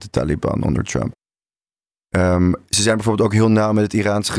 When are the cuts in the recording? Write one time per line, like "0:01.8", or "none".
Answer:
none